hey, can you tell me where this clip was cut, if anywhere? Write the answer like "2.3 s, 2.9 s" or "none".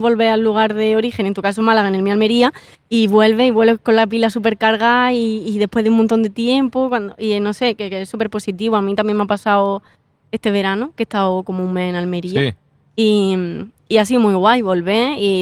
none